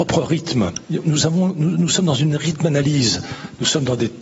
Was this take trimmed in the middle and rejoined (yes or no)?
no